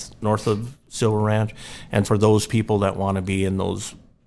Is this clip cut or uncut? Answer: cut